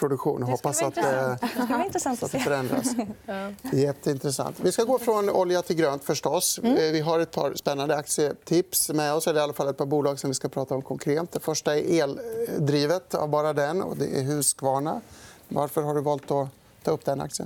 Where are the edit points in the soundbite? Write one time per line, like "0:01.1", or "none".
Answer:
none

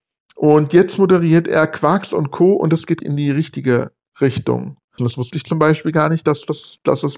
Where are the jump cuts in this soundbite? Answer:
0:03.0
0:05.0

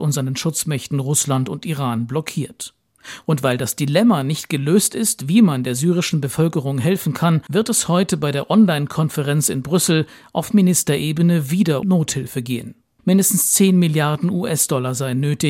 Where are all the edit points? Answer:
0:07.5
0:11.8

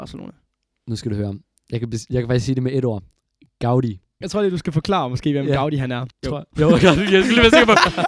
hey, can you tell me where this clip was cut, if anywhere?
0:04.2
0:06.1

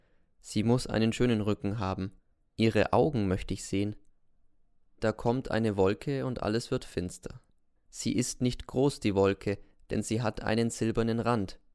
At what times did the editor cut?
none

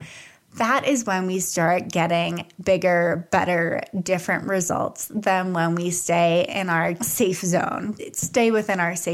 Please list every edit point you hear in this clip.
0:08.0

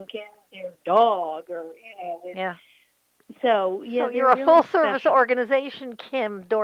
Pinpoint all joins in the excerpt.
none

